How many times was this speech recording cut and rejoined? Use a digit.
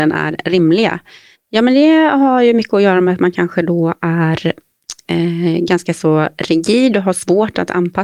1